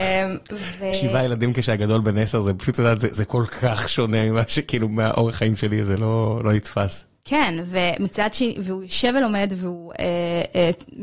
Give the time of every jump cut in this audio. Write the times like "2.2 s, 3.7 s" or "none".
none

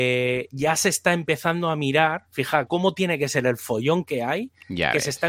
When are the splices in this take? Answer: 2.7 s

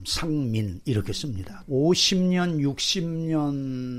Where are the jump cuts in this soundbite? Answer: 1.6 s

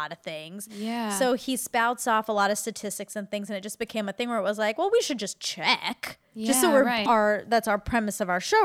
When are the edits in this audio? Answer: 7.1 s

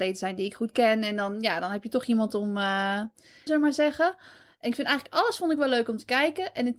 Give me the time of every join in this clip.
3.5 s

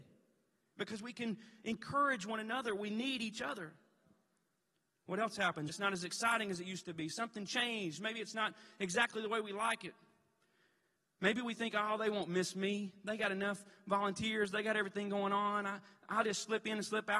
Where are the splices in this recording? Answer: 5.7 s

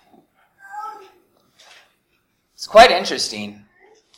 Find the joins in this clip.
none

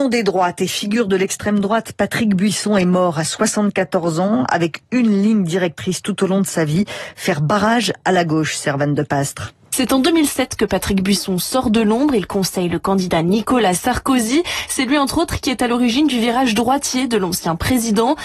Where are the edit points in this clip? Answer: none

